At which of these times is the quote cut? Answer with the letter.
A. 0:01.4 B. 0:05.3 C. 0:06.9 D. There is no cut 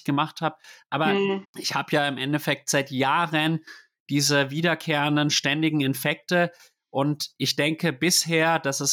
A